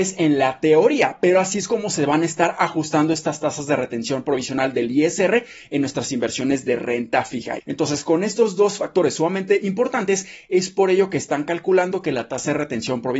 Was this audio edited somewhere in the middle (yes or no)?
yes